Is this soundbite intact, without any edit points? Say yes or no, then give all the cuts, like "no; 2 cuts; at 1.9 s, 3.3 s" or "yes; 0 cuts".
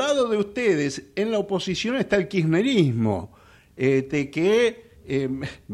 yes; 0 cuts